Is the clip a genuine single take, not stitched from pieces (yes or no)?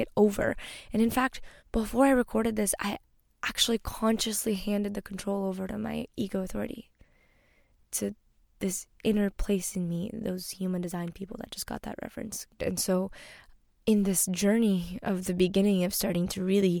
no